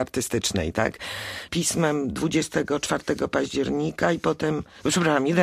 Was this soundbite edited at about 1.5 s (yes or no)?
yes